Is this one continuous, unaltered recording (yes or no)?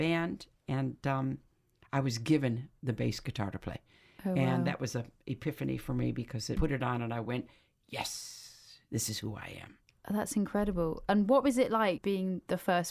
yes